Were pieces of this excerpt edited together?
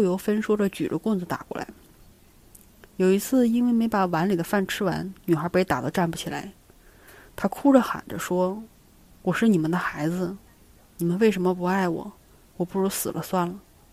no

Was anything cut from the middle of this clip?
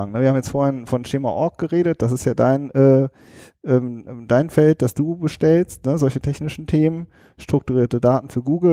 no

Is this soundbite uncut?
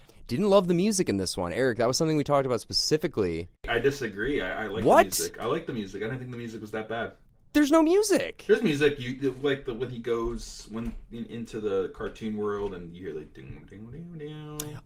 yes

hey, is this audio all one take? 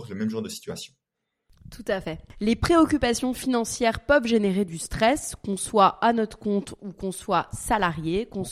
yes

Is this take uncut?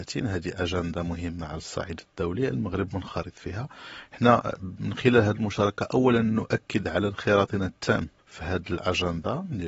no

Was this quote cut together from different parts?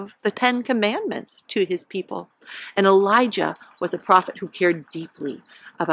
no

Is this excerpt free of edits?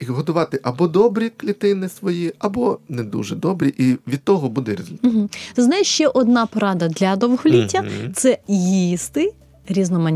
yes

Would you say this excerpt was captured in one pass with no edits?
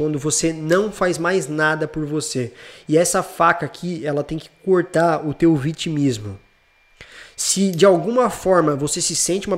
yes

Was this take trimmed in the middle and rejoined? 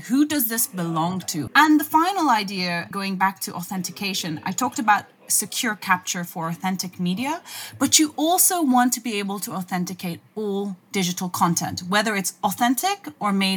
yes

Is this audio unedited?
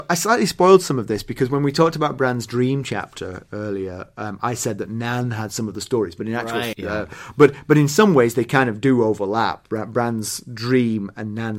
no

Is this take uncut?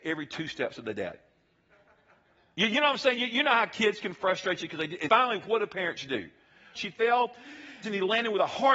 no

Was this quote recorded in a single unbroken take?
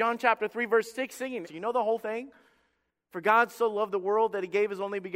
no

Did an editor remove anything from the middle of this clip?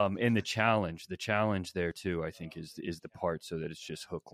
no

